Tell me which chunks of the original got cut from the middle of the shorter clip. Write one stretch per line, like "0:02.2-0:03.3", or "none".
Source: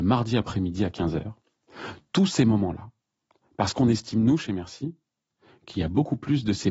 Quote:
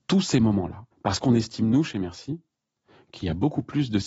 0:03.0-0:03.5